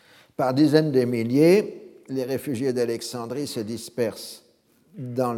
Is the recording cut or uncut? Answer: uncut